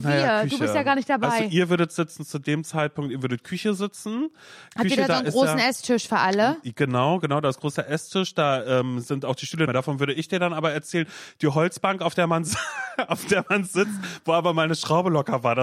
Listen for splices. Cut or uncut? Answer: cut